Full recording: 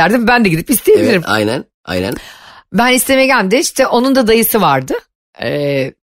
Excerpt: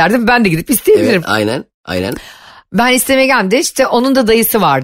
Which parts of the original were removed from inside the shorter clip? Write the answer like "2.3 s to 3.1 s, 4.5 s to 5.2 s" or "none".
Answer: none